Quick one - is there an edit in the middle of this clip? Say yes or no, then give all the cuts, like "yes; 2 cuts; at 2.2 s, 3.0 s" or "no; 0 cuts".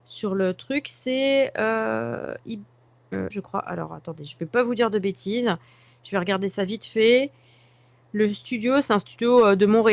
yes; 1 cut; at 3.3 s